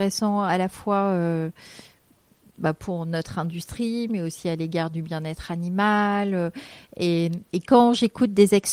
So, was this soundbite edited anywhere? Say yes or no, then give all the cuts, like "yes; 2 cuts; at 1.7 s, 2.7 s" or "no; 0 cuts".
no; 0 cuts